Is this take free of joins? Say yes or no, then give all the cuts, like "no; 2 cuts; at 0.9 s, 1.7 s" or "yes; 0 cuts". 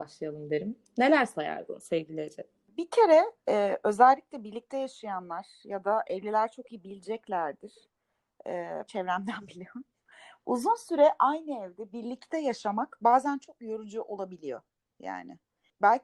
no; 1 cut; at 8.9 s